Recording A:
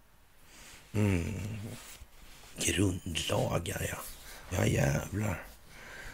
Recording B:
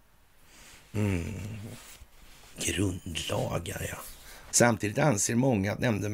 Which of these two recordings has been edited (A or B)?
B